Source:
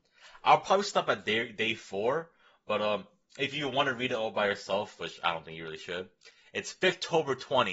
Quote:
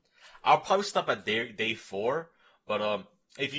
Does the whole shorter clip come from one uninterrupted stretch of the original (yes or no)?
yes